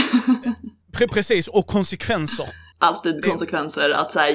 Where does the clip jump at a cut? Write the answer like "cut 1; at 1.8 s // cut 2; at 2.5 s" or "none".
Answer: cut 1; at 2.7 s

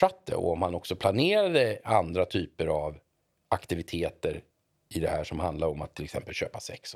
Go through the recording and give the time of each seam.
none

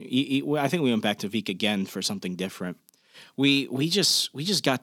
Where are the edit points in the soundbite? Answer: none

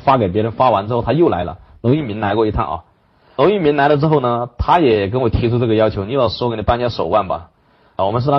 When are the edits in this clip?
none

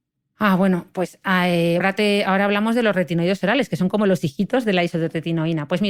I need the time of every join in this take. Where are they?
cut 1; at 1.8 s

